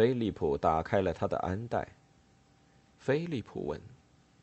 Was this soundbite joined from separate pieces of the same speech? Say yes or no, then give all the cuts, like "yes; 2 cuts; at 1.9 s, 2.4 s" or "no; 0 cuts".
yes; 1 cut; at 2.9 s